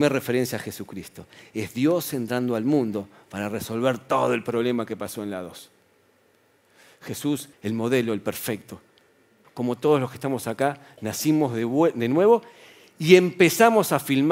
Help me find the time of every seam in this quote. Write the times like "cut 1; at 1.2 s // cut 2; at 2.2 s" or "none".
cut 1; at 7.5 s // cut 2; at 9.4 s